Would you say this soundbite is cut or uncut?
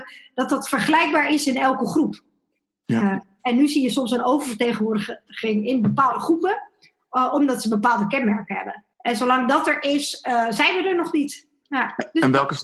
cut